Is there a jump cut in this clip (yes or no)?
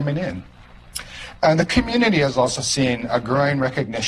no